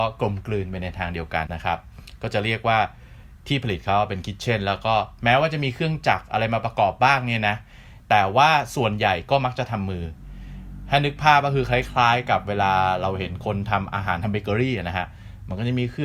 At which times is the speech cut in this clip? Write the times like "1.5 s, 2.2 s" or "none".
1.5 s